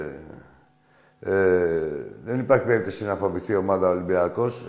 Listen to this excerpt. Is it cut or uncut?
uncut